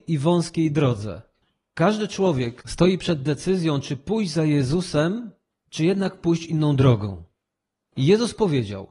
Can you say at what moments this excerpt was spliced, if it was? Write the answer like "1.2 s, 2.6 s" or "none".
none